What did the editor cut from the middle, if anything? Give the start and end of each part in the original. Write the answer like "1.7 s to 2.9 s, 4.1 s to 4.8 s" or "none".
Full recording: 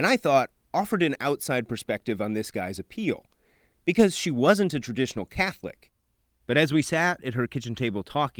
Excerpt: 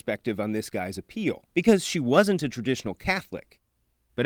3.3 s to 3.8 s